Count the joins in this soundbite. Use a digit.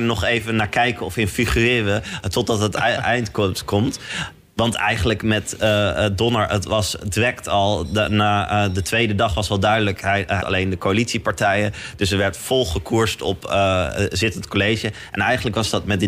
1